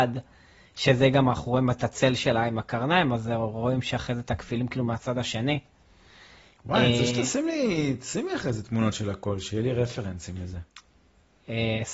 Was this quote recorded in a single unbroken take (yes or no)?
yes